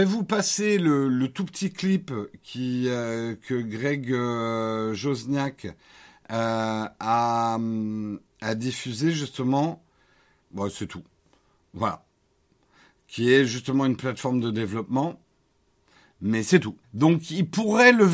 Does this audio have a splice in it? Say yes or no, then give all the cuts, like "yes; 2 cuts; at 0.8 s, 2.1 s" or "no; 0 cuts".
yes; 2 cuts; at 10.4 s, 16.8 s